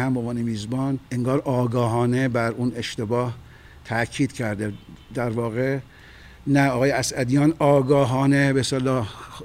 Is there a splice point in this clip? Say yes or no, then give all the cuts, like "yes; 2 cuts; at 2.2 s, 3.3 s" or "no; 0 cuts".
yes; 1 cut; at 1.1 s